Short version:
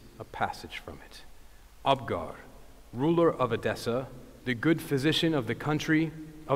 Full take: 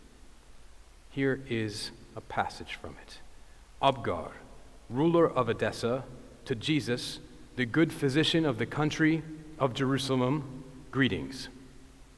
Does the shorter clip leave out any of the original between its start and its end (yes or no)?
yes